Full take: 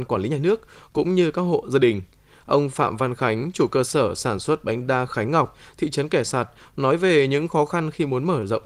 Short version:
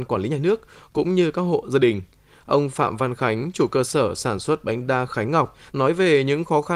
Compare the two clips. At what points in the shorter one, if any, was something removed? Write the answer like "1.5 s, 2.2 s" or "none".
5.7 s